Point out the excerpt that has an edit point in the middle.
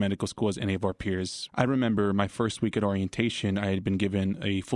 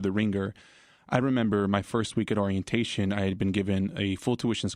first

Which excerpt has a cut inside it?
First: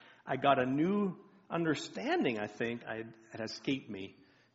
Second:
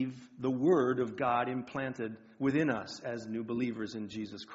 first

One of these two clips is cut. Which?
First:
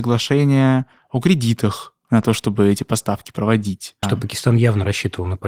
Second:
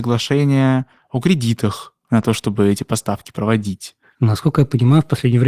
first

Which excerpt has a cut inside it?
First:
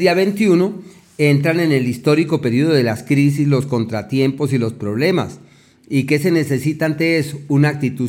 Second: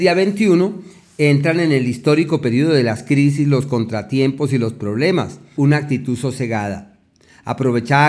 second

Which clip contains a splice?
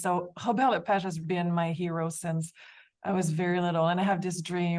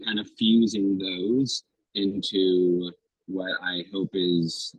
first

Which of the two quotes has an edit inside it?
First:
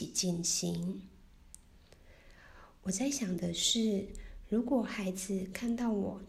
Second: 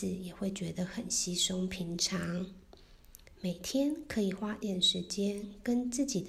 second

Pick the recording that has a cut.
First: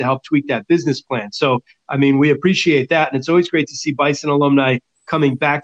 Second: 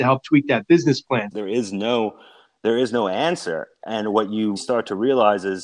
second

